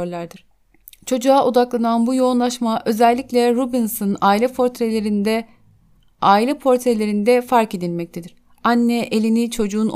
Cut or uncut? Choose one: uncut